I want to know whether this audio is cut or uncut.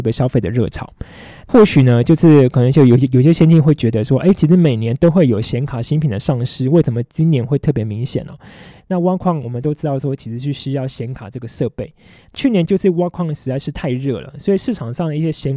cut